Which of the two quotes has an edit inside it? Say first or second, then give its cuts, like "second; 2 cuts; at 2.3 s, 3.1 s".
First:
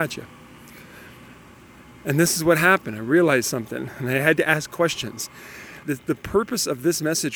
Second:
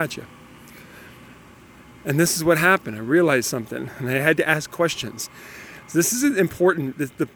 first; 1 cut; at 5.8 s